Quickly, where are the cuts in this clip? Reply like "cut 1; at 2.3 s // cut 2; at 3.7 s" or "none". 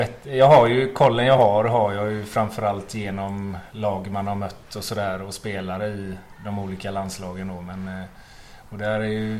none